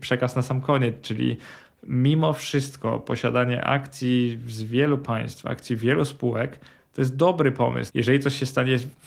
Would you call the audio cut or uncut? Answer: cut